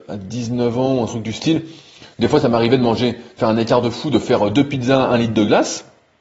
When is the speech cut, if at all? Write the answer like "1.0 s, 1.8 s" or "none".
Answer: none